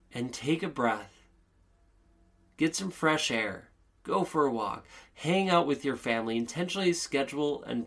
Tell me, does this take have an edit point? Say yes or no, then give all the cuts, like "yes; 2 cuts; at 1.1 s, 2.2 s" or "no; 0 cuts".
no; 0 cuts